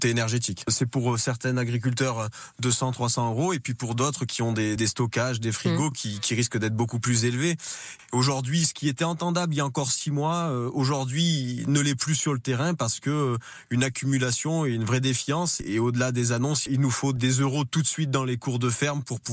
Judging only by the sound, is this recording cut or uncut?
uncut